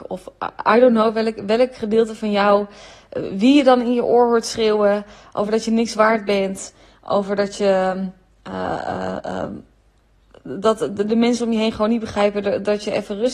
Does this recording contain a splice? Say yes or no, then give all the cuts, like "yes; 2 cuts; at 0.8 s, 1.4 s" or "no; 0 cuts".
no; 0 cuts